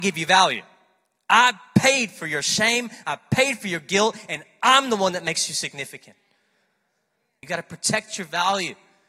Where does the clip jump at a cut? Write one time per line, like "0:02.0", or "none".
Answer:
0:07.4